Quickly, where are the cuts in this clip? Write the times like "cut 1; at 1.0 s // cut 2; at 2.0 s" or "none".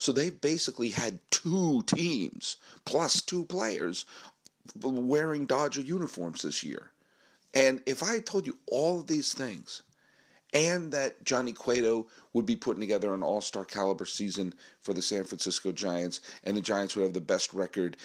cut 1; at 7.4 s